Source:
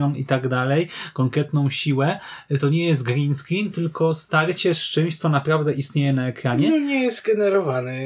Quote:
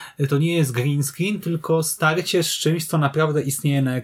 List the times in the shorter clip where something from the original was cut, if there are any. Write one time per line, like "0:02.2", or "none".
none